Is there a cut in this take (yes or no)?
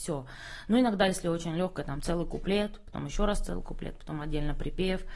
no